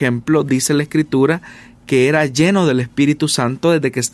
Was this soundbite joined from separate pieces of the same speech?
no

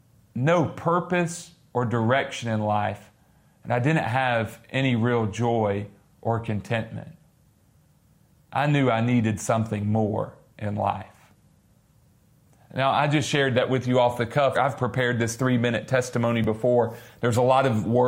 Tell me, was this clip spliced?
yes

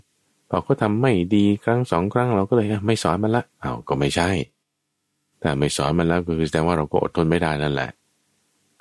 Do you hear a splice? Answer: yes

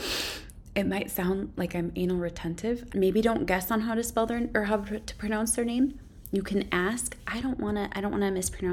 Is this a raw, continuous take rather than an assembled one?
no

